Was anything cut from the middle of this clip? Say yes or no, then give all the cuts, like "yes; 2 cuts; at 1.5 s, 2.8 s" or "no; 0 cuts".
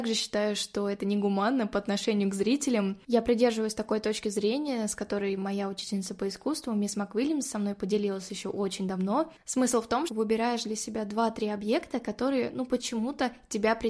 yes; 1 cut; at 10.1 s